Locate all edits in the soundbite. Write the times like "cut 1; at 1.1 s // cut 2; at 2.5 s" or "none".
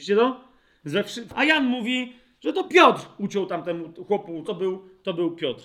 cut 1; at 1.3 s // cut 2; at 4.5 s